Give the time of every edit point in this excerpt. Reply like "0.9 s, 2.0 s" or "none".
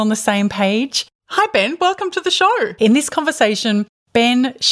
1.1 s, 2.8 s